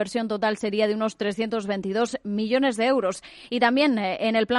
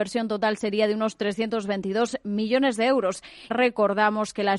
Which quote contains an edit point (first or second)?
second